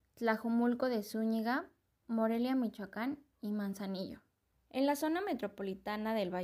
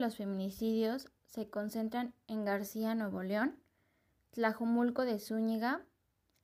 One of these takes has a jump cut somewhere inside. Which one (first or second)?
first